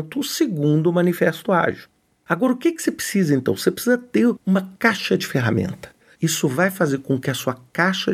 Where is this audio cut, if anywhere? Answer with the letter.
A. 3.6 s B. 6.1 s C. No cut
B